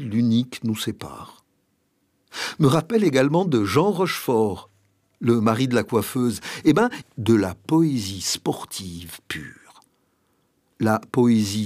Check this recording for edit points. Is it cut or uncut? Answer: cut